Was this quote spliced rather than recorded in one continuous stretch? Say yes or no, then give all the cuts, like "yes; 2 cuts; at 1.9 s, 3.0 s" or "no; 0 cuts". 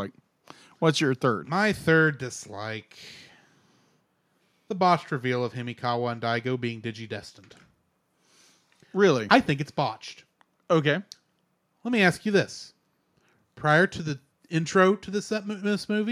no; 0 cuts